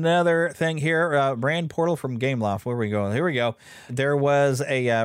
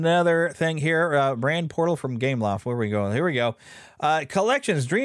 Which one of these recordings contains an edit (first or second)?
first